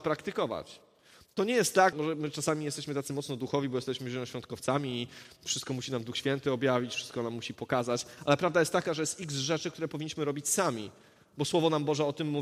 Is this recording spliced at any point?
yes; 1 cut; at 1.9 s

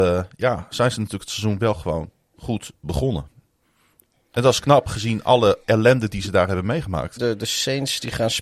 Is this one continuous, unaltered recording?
no; 1 cut; at 7.2 s

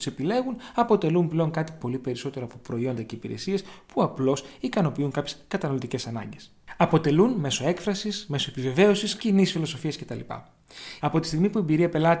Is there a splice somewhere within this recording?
yes; 2 cuts; at 9.2 s, 11.0 s

